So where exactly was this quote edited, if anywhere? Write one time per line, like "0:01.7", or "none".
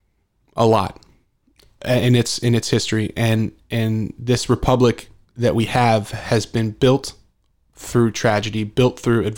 none